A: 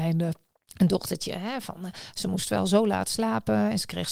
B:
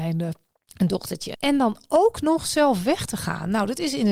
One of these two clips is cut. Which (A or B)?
B